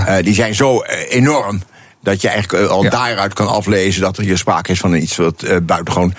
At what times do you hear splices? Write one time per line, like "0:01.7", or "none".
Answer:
none